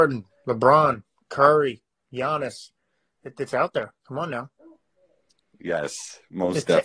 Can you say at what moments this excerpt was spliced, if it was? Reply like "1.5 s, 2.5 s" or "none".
none

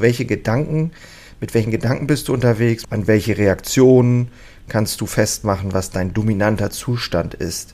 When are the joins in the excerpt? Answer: 2.8 s

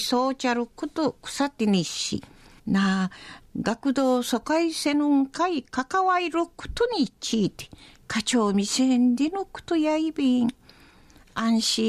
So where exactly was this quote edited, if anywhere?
2.6 s

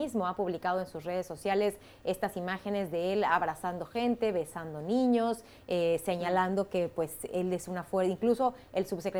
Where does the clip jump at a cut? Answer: none

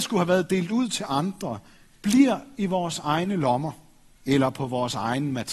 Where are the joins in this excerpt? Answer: 4.2 s

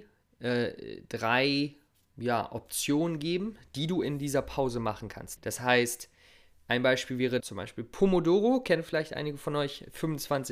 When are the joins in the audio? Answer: 5.4 s, 7.4 s

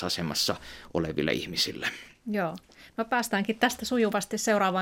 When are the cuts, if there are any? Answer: none

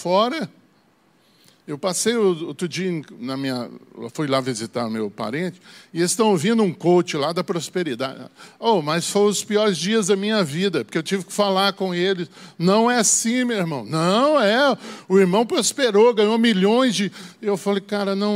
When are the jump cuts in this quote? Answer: none

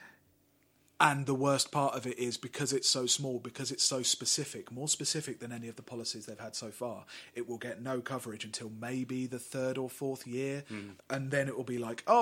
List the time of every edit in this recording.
11.0 s

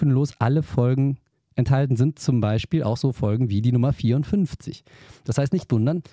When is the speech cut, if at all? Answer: none

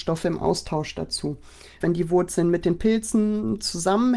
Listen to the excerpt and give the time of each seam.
1.8 s

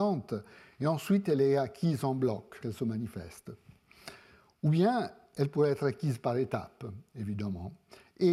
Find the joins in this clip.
2.6 s

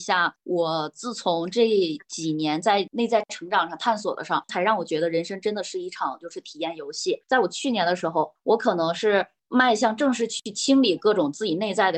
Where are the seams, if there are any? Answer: 4.5 s

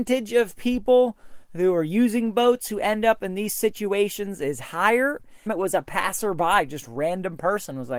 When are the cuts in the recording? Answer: 5.5 s

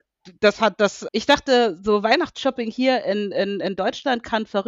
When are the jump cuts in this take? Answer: 1.1 s

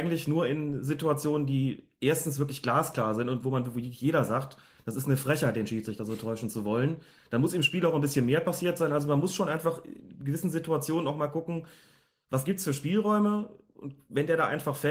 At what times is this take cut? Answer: none

